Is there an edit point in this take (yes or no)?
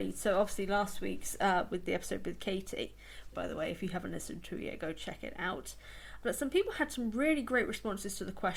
yes